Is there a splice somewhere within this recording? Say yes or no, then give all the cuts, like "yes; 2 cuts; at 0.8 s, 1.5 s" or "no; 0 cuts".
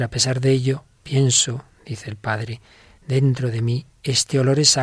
no; 0 cuts